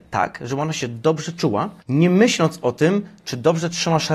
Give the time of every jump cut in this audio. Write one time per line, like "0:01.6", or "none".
0:01.8